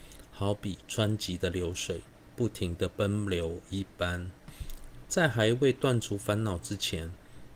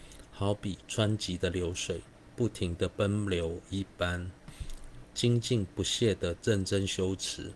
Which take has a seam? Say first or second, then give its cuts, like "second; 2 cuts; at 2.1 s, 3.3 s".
second; 1 cut; at 5.1 s